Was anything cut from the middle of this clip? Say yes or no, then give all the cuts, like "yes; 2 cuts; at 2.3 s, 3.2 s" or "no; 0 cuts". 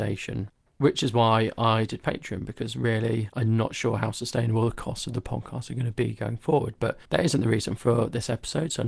yes; 1 cut; at 7.1 s